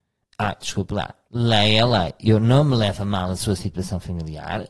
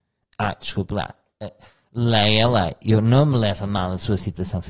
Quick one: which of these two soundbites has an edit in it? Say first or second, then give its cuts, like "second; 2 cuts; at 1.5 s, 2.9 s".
first; 1 cut; at 1.3 s